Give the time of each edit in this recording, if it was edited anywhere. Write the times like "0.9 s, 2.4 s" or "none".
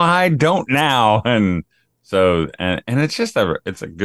none